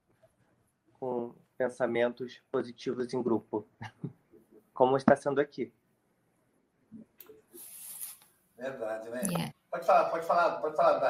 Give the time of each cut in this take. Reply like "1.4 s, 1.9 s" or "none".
9.5 s

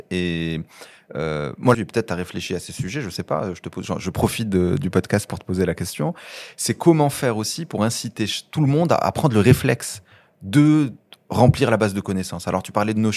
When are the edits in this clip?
1.7 s

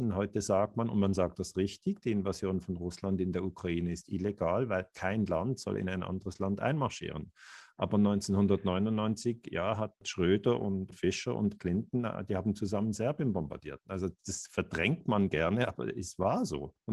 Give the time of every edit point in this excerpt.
none

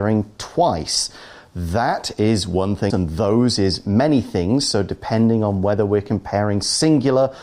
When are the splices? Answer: 2.9 s

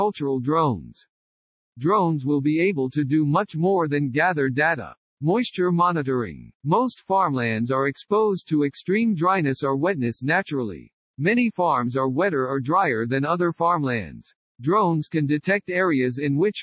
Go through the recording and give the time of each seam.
none

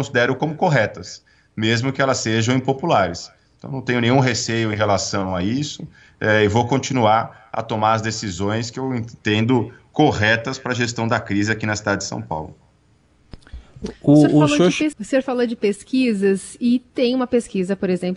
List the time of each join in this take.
14.9 s

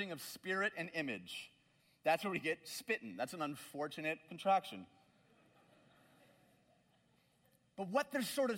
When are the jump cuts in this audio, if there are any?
none

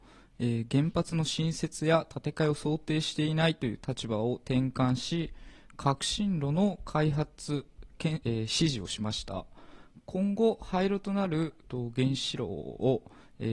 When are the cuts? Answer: 8.2 s, 11.6 s

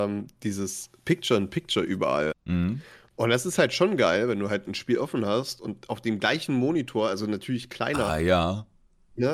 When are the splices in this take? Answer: 2.3 s, 8.1 s

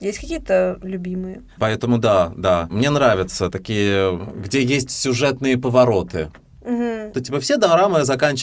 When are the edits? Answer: 1.6 s, 7.1 s

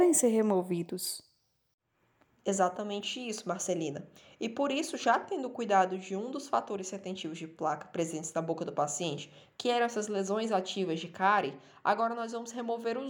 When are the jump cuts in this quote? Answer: none

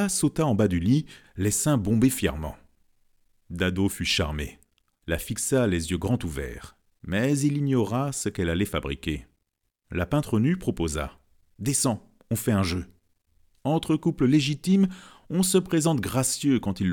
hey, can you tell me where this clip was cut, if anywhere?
1.2 s, 13.5 s

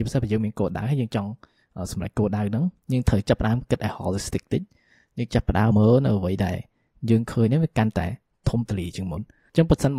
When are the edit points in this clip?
5.7 s

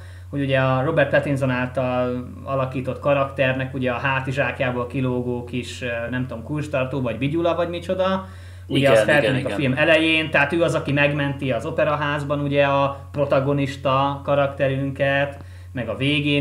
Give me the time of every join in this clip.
none

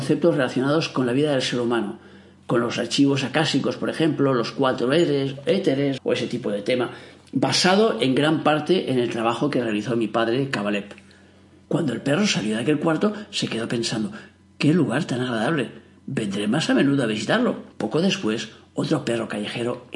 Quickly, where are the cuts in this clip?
6.0 s, 11.6 s, 17.7 s

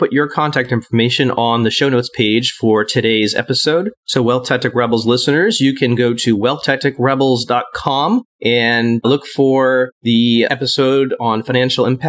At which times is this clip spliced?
none

